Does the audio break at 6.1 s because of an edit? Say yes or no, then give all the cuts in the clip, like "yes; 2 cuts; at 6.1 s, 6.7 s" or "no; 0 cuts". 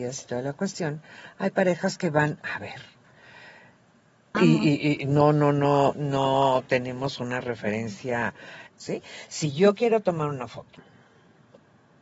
no; 2 cuts; at 4.3 s, 8.7 s